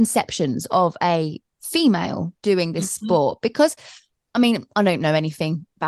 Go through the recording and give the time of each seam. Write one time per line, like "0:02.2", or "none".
none